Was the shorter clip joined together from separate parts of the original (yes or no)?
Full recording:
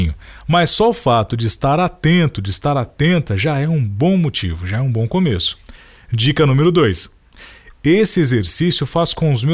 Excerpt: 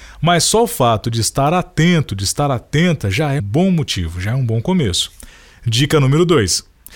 yes